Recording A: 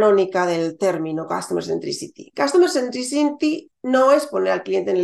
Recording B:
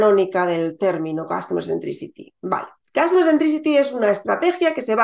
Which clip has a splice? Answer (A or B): A